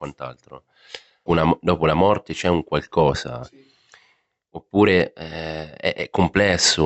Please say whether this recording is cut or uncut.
cut